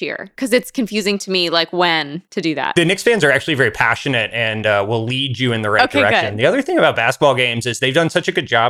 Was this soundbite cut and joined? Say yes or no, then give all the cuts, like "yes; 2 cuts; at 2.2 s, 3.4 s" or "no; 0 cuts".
no; 0 cuts